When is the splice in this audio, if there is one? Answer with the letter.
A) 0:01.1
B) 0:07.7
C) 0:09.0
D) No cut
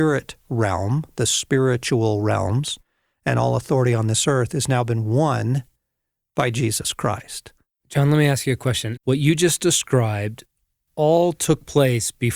C